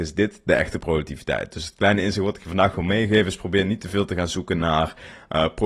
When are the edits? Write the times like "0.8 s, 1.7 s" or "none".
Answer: none